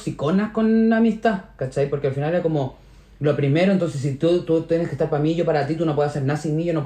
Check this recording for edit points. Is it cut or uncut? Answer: uncut